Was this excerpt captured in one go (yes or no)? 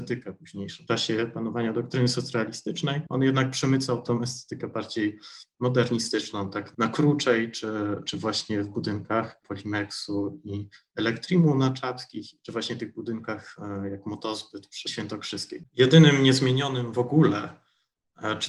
no